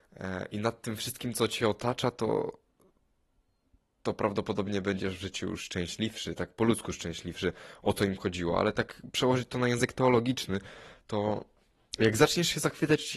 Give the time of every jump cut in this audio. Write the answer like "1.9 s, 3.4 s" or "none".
none